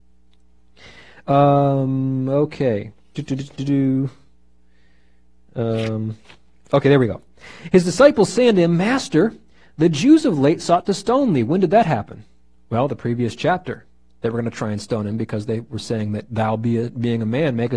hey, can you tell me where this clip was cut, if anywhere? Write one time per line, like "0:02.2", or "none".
none